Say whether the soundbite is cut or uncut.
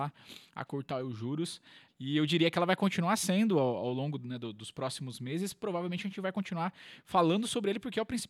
cut